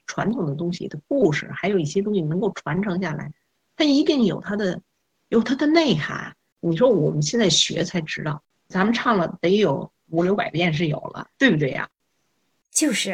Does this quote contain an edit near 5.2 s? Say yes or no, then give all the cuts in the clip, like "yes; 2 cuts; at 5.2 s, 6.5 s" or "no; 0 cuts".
no; 2 cuts; at 6.5 s, 8.6 s